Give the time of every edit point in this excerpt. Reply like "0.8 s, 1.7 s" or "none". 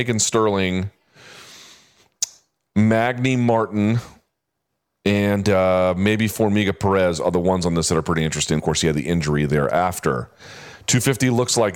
8.6 s